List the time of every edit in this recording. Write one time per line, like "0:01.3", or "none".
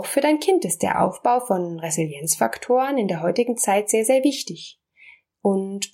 none